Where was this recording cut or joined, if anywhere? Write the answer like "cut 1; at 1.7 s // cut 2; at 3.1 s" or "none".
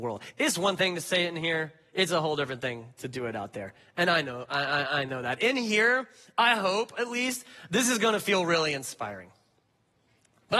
none